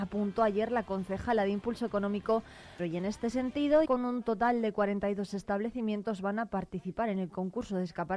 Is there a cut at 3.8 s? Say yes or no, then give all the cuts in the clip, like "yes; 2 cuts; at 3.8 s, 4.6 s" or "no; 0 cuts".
yes; 2 cuts; at 2.8 s, 3.8 s